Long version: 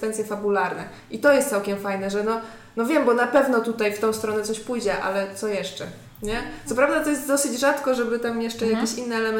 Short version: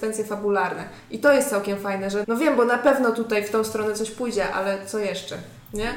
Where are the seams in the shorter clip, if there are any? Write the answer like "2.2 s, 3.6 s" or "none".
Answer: 2.2 s